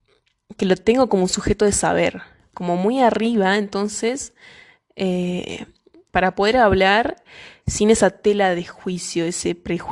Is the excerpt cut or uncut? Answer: cut